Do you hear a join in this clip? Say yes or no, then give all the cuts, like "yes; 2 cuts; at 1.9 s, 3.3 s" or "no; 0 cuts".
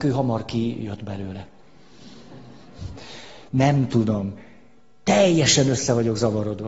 yes; 1 cut; at 3.5 s